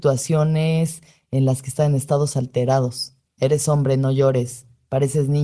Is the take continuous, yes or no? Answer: no